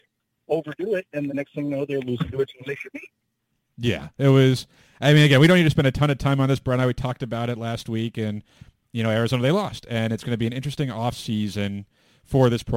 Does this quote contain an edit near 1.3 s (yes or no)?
yes